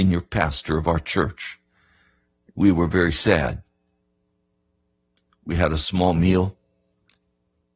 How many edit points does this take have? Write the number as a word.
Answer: one